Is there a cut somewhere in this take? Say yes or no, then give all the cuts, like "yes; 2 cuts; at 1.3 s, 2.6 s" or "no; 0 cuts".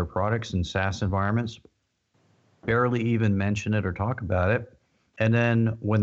no; 0 cuts